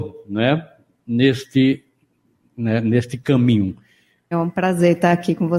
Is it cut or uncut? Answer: cut